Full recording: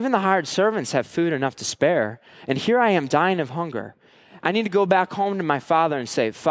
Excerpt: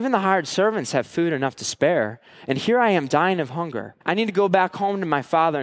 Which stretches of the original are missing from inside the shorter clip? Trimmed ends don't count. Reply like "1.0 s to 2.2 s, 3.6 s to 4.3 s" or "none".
4.0 s to 4.4 s